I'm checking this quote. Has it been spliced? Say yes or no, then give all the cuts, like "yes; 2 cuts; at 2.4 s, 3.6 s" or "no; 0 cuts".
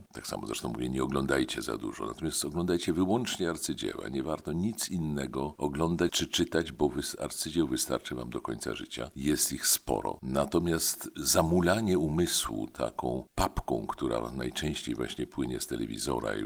no; 0 cuts